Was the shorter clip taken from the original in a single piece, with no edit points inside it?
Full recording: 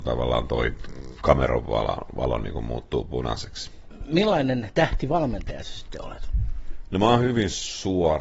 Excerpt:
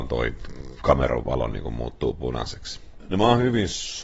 no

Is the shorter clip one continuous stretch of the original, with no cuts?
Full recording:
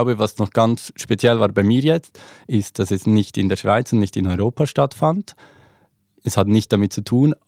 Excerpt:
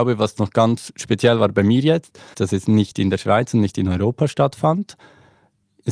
no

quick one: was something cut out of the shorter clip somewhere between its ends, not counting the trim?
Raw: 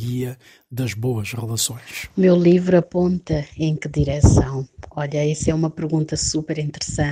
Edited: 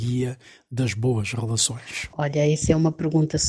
yes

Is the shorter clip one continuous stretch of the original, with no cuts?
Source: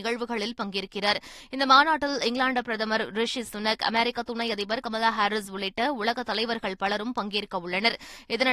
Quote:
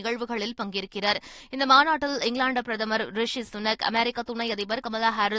yes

